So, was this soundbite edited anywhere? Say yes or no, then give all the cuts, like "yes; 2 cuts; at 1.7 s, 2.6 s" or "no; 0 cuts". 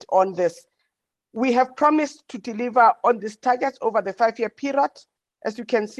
no; 0 cuts